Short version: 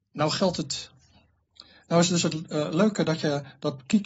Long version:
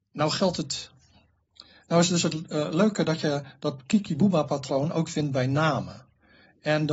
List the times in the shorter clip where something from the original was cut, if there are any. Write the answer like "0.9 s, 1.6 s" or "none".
none